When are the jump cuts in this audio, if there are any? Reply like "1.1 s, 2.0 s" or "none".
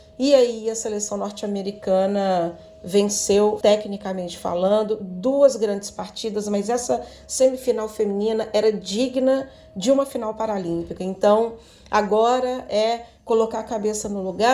3.6 s, 11.0 s